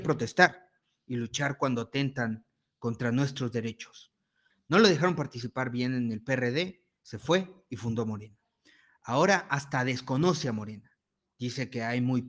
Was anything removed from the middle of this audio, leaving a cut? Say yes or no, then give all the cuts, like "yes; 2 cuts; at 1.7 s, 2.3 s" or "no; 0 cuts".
yes; 1 cut; at 4.5 s